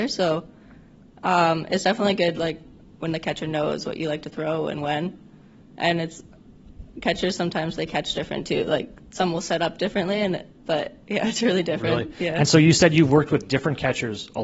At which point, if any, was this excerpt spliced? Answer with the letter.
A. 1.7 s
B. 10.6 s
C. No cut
B